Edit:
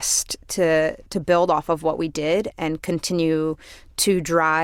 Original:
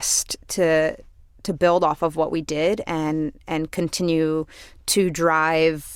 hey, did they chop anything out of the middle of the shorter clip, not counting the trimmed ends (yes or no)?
yes